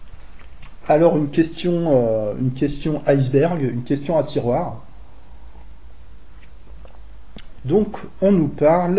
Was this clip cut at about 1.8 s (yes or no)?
no